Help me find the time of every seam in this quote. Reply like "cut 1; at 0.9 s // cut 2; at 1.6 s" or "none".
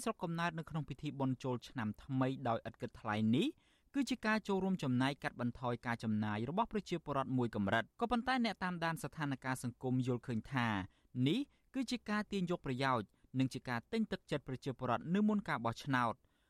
cut 1; at 7.9 s